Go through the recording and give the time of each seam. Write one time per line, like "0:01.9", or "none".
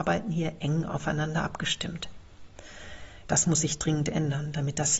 0:03.3